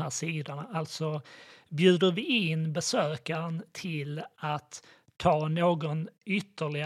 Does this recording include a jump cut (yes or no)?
no